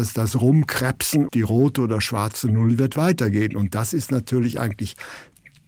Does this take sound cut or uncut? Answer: cut